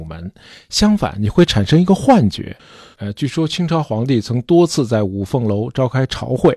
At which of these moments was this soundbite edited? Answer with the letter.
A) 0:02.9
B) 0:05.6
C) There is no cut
A